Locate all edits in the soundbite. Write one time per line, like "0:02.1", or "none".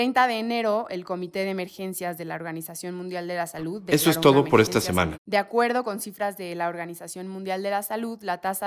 0:05.1